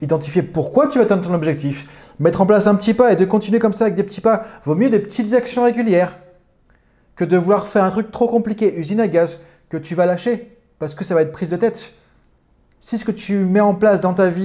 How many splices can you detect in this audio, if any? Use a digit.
0